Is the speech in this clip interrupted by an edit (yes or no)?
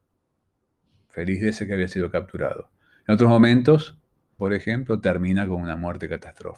yes